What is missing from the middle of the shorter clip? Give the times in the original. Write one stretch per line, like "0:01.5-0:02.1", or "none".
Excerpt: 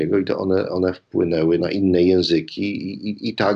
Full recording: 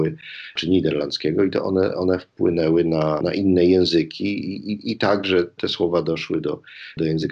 0:02.8-0:03.2